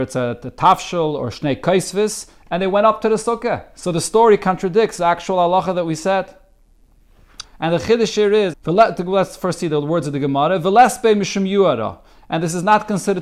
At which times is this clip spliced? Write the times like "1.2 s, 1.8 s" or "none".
7.4 s, 8.5 s